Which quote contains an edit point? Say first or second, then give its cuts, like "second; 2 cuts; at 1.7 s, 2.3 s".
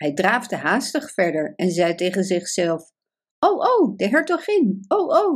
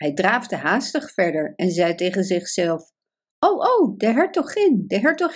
first; 1 cut; at 4.0 s